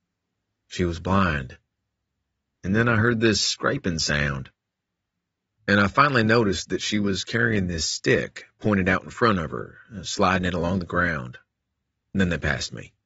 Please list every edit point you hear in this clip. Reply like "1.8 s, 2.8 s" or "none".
2.6 s